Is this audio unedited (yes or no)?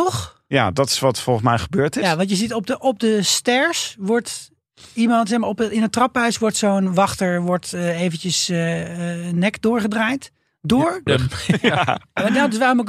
no